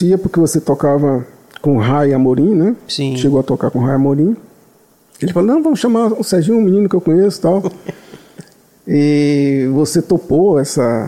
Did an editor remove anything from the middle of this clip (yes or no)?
no